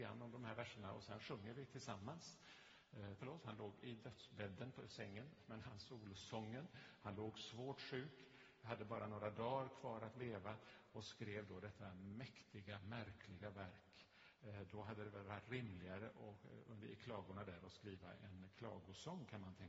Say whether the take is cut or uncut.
cut